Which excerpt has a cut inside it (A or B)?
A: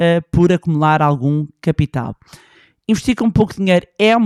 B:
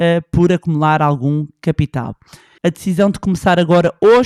B